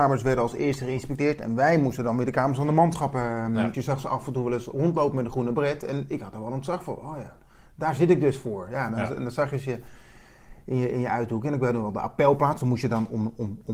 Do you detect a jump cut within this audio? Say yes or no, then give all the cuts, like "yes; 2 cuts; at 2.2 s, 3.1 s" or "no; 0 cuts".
yes; 1 cut; at 3.7 s